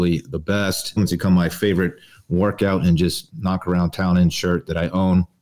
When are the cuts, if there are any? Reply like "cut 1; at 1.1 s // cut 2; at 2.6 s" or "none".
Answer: cut 1; at 1.0 s // cut 2; at 3.3 s